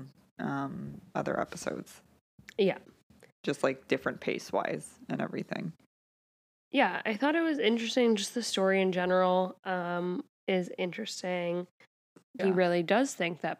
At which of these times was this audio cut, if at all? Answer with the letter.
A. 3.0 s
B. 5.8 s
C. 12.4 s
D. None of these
C